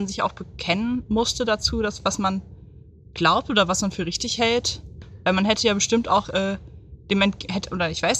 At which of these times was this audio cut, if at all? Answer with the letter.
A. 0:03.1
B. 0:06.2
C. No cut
B